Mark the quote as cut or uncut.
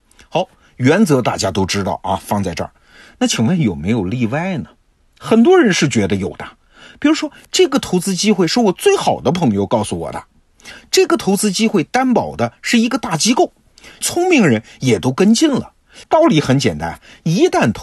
cut